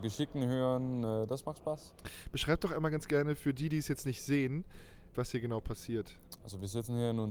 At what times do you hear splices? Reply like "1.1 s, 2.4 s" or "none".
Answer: 5.1 s